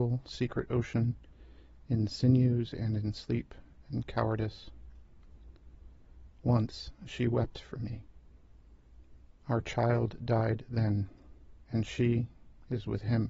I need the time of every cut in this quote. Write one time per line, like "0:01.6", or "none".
0:06.3
0:11.6

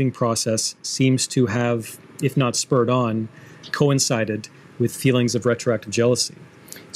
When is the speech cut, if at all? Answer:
0:03.7

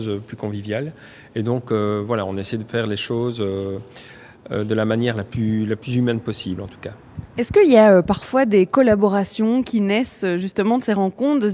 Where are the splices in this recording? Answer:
none

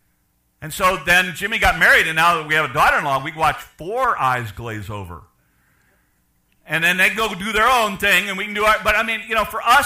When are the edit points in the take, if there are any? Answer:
none

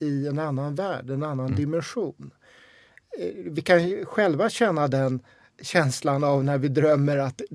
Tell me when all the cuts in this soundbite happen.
none

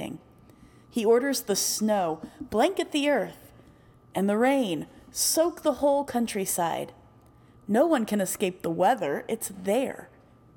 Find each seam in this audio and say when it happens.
none

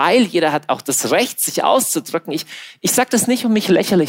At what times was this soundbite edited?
none

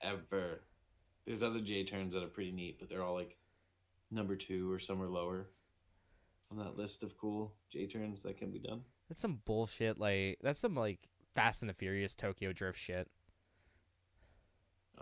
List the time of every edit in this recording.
none

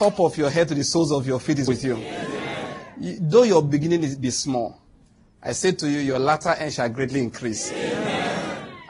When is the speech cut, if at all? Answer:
0:01.7

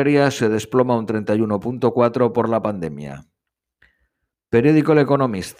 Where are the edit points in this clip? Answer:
none

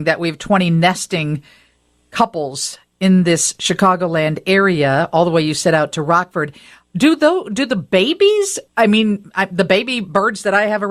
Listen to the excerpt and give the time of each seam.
0:08.7

